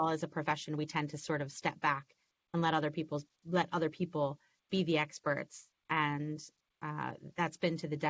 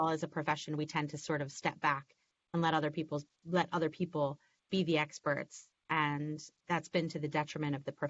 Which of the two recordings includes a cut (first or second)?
second